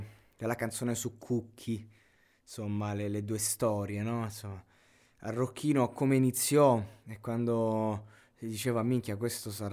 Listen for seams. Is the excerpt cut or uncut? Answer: uncut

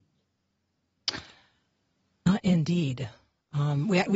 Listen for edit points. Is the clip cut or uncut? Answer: uncut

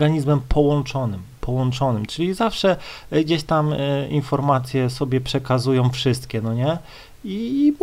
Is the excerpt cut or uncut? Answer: uncut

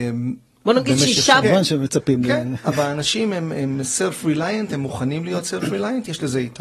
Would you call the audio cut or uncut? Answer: cut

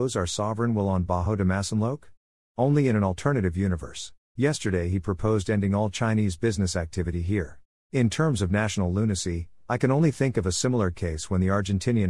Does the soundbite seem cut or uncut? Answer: cut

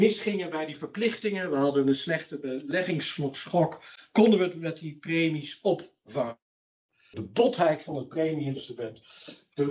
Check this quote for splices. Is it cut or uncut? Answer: cut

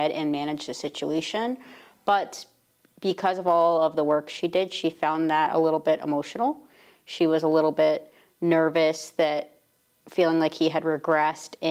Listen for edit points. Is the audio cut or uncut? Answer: uncut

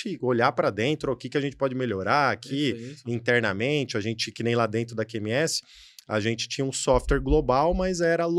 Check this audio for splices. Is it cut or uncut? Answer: uncut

